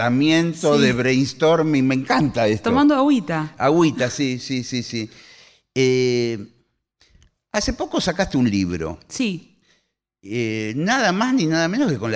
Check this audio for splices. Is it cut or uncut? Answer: uncut